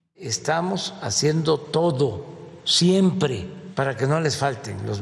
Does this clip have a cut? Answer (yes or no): no